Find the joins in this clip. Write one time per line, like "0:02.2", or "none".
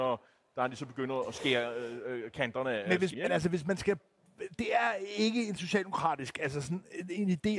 0:03.1